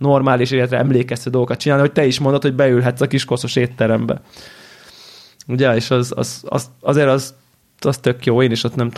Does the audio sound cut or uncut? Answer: uncut